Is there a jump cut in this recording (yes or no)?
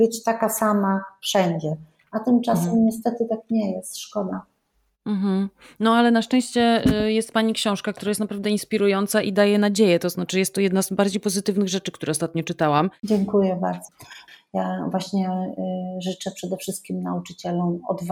no